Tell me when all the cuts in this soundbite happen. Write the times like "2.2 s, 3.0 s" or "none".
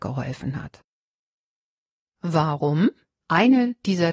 3.2 s